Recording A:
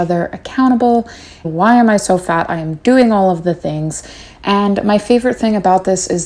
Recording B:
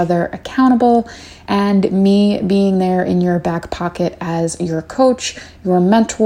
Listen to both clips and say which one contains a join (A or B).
A